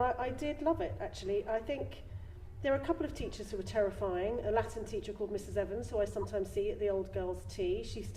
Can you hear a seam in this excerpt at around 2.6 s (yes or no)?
no